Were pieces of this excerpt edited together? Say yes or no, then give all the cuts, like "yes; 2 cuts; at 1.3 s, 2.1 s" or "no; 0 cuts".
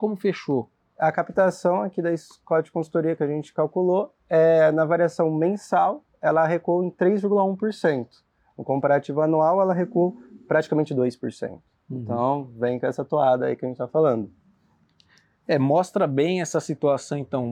no; 0 cuts